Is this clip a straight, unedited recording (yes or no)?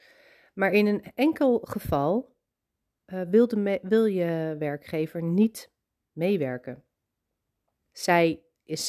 no